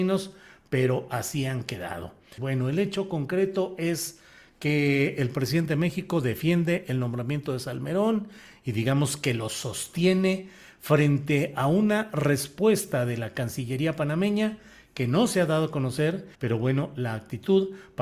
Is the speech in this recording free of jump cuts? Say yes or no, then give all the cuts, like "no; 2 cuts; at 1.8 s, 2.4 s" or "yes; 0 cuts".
no; 2 cuts; at 2.4 s, 16.3 s